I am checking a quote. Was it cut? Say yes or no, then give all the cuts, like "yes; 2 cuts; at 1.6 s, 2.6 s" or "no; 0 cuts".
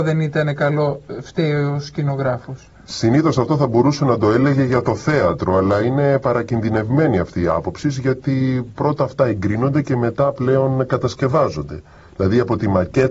no; 0 cuts